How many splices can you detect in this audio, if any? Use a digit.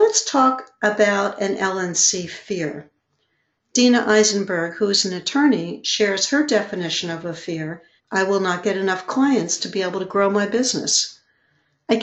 1